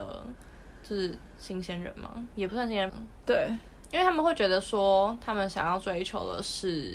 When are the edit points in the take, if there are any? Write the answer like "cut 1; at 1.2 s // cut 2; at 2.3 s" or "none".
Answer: cut 1; at 2.9 s